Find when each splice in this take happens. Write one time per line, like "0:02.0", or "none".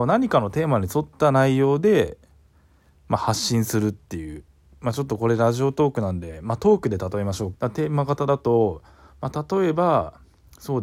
0:07.5